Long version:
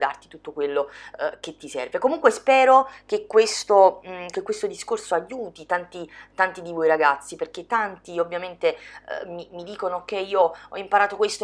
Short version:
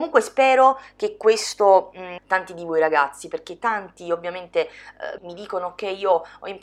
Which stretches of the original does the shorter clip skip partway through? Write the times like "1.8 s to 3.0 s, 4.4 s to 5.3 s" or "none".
4.3 s to 6.3 s, 9.3 s to 9.5 s